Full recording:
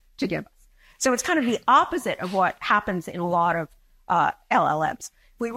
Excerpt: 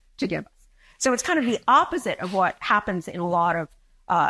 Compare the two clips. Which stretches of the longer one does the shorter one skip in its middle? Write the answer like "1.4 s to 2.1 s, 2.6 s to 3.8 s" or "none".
none